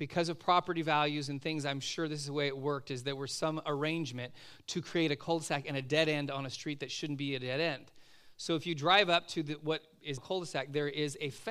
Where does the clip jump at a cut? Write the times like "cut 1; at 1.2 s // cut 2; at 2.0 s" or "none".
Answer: cut 1; at 10.2 s